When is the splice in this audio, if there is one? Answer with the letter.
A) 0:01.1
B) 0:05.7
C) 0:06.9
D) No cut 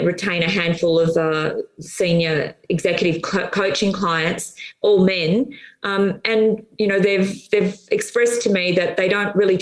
D